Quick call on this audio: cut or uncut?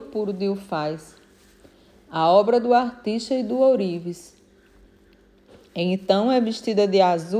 uncut